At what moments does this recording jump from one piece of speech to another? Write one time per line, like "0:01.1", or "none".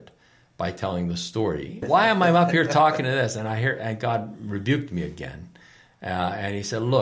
0:01.8